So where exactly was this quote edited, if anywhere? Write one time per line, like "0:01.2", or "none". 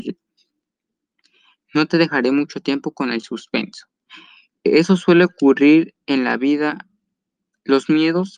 0:04.5